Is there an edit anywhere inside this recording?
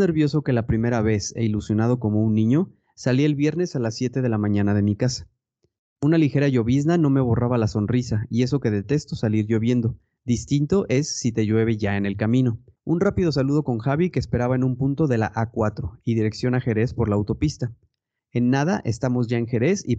yes; 2 cuts; at 12.8 s, 18.2 s

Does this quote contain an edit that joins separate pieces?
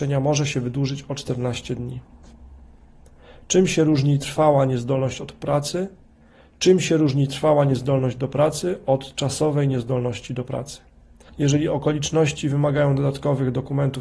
yes; 1 cut; at 11.3 s

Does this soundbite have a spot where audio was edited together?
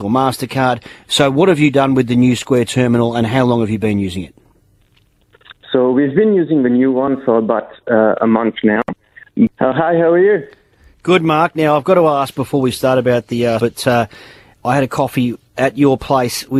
yes; 2 cuts; at 9.5 s, 13.6 s

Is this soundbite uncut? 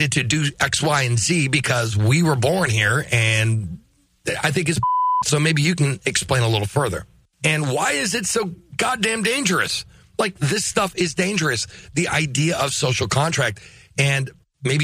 no; 1 cut; at 7.3 s

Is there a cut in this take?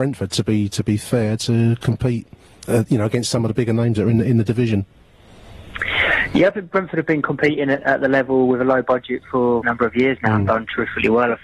yes; 1 cut; at 9.6 s

